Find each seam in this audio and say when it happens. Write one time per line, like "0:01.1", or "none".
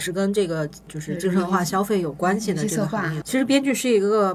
0:03.2